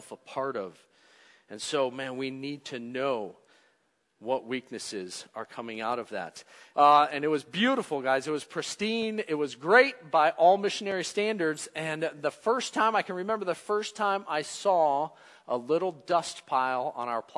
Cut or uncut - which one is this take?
cut